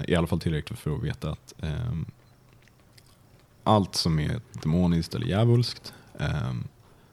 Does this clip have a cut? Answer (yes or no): no